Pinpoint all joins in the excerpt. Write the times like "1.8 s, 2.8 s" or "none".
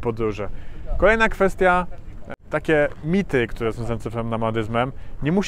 none